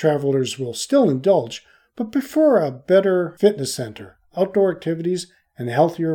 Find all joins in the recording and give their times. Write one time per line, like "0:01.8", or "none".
none